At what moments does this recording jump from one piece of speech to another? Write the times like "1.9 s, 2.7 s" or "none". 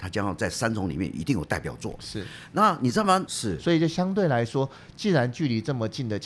3.3 s

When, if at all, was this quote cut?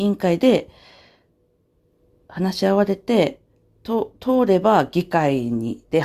none

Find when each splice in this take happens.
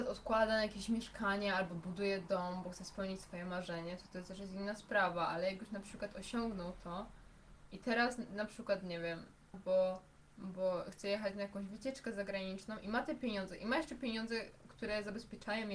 9.5 s

